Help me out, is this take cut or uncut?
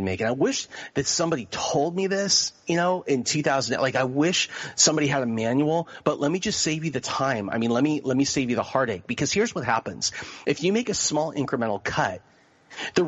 uncut